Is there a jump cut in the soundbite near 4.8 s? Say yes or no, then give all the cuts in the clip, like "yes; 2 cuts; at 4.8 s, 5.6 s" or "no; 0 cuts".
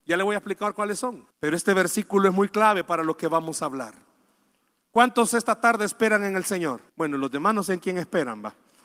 no; 2 cuts; at 1.3 s, 6.9 s